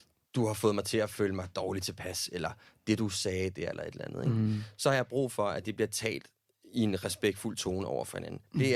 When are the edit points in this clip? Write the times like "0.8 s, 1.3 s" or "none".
none